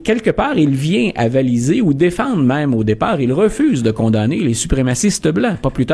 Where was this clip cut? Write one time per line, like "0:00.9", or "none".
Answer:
none